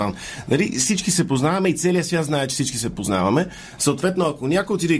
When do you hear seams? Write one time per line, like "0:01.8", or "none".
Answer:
none